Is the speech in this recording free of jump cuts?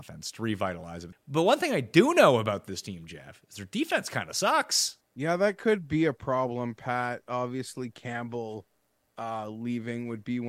no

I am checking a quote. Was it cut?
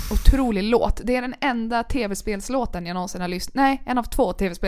no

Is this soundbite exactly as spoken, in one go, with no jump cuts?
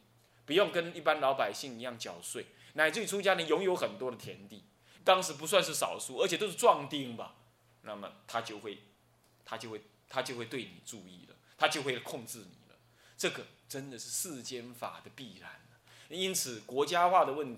no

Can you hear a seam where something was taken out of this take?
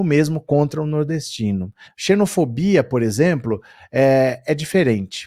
yes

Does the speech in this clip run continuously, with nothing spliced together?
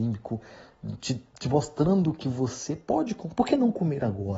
yes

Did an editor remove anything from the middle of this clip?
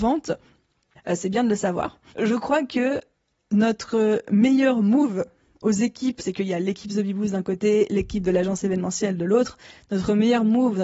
yes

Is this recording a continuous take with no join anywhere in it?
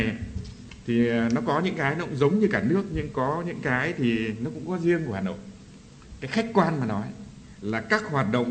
yes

